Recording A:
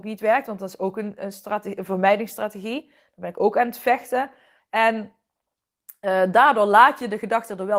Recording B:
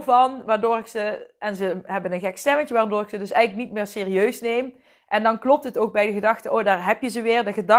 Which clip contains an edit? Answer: A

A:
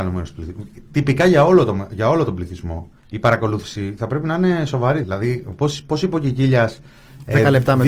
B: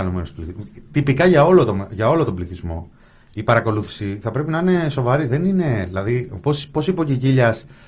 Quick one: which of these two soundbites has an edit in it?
A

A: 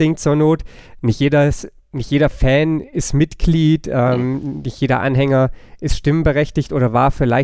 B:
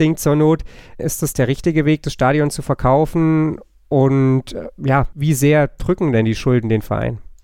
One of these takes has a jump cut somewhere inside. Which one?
B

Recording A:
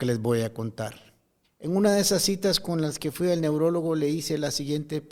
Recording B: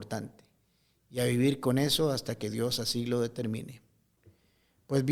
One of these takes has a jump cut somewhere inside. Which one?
A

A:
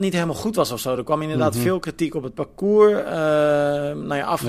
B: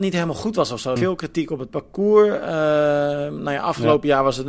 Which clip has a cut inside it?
B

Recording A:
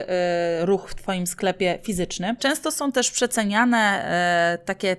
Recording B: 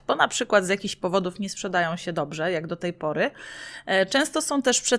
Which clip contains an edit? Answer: A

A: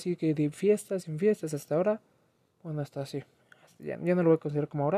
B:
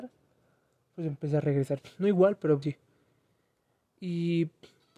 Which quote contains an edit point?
B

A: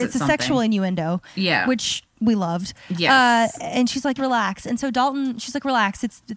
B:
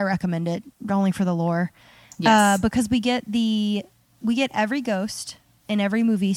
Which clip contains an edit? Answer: A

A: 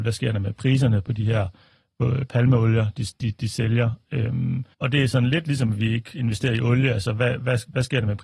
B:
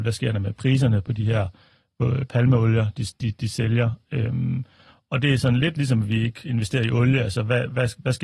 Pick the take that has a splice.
A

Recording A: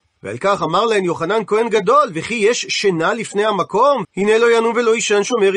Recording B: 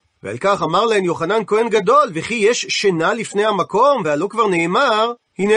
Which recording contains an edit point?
A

